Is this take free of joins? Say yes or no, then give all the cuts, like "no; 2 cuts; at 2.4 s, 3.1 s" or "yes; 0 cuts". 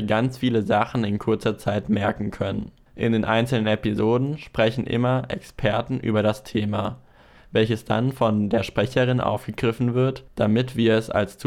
yes; 0 cuts